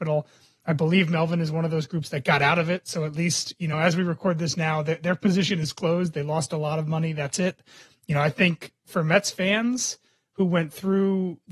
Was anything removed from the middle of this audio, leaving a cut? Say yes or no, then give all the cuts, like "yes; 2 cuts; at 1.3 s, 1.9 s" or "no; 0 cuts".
no; 0 cuts